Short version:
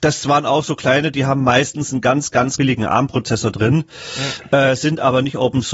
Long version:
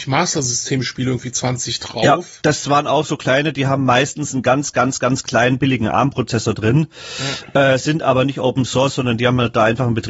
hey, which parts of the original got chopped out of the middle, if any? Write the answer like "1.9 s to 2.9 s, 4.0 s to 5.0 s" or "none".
5.0 s to 5.6 s